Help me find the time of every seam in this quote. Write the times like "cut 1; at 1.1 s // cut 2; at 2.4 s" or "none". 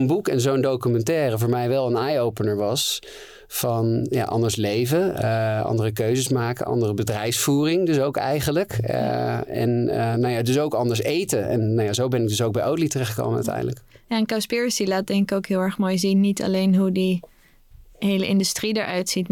none